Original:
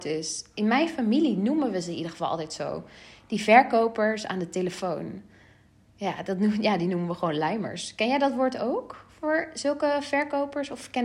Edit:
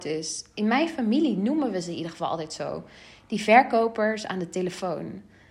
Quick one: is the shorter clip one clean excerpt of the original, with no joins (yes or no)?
yes